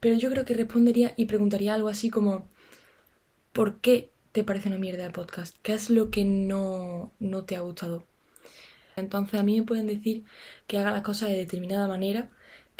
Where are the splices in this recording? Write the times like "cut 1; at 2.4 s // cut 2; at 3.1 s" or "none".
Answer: cut 1; at 9.0 s

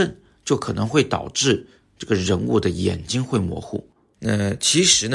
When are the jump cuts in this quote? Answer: cut 1; at 4.1 s

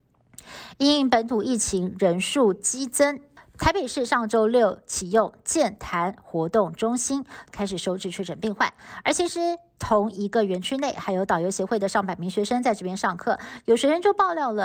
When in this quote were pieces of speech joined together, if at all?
cut 1; at 7.5 s

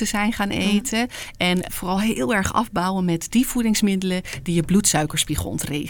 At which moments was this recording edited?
cut 1; at 1.7 s

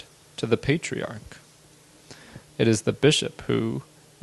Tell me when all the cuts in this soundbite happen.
cut 1; at 2.5 s

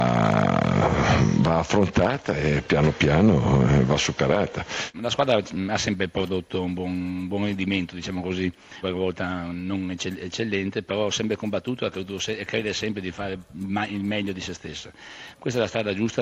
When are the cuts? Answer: cut 1; at 4.9 s // cut 2; at 8.8 s

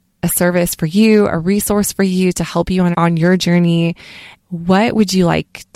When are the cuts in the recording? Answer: cut 1; at 2.9 s // cut 2; at 4.4 s

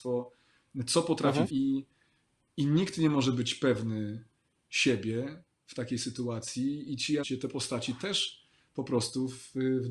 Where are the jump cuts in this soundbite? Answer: cut 1; at 1.5 s // cut 2; at 7.2 s

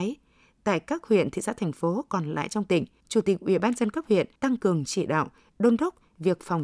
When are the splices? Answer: cut 1; at 3.0 s // cut 2; at 4.4 s

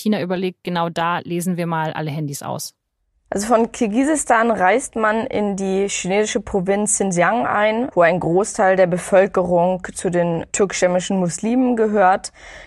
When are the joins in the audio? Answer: none

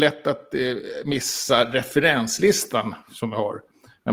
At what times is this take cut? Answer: none

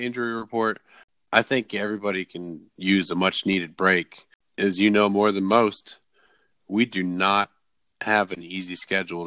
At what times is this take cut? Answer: none

